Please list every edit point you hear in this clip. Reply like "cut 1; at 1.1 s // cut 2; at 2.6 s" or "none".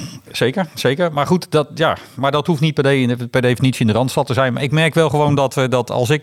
none